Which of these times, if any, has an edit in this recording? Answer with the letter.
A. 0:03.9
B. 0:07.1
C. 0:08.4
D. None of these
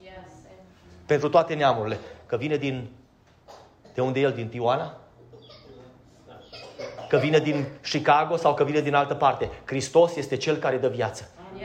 B